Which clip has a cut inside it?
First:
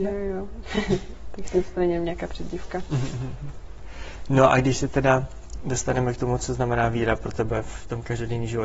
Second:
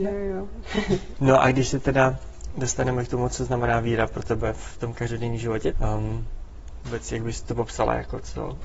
second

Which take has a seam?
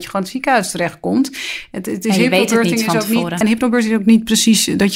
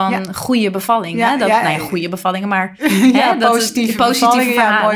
first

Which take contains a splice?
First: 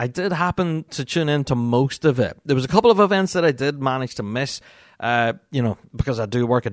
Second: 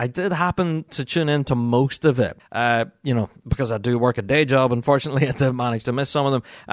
second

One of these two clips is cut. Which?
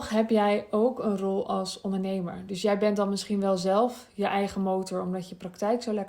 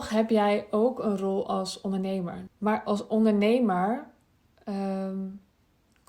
second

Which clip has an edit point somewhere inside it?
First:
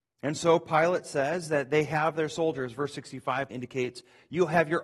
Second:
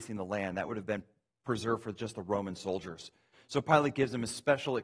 first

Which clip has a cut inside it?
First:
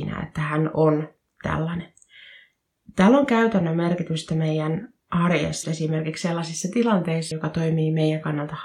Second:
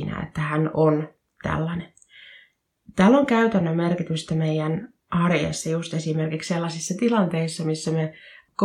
first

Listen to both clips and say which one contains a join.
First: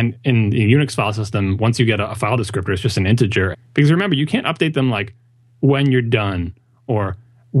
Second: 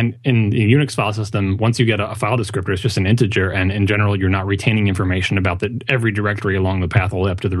first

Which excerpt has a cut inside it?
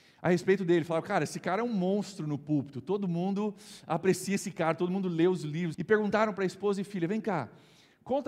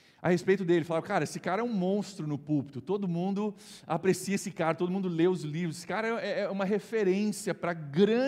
first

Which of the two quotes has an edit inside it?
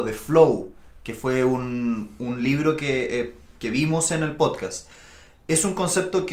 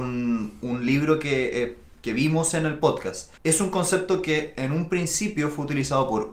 second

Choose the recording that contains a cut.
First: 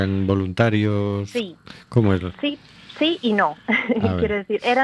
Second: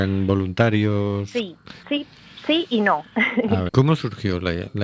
second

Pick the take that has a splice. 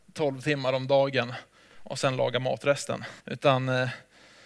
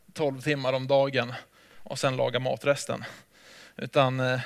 first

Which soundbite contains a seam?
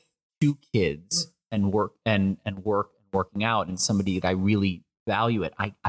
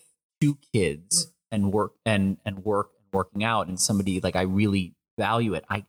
first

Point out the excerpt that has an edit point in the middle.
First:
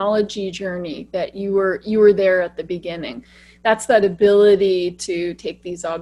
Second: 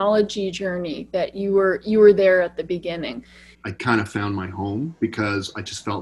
second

